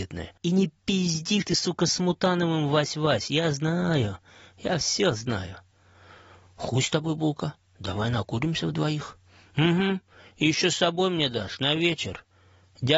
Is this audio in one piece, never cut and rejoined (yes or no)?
no